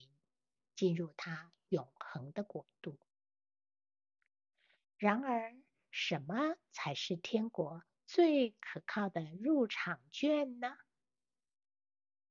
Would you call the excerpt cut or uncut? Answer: uncut